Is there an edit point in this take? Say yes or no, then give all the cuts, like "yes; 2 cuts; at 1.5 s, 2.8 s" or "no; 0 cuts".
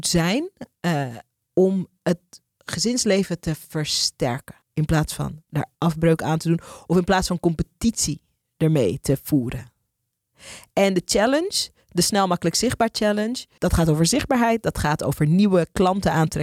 yes; 2 cuts; at 4.6 s, 13.6 s